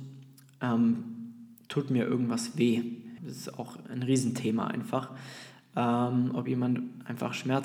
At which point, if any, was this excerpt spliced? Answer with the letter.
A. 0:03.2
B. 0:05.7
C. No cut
A